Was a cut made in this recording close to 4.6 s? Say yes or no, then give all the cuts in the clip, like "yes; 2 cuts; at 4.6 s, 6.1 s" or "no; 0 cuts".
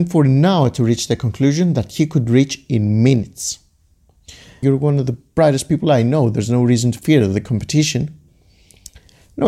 yes; 1 cut; at 4.6 s